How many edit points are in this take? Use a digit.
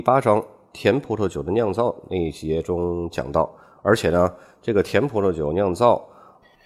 0